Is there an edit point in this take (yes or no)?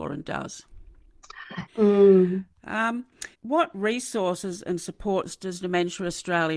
yes